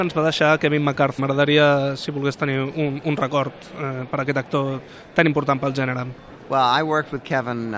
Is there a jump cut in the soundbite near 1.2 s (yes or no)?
yes